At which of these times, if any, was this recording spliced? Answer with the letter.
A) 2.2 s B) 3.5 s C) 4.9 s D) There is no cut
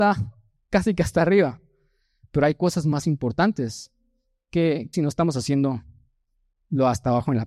C